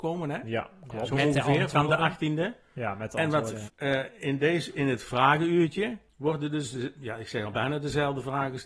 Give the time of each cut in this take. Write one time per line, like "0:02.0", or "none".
0:03.6
0:06.1